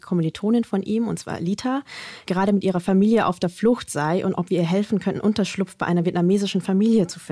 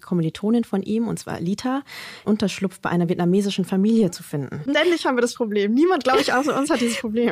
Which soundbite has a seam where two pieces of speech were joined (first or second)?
second